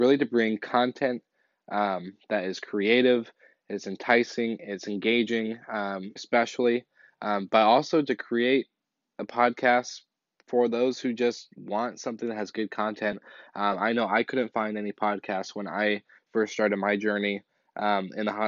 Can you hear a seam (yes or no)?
yes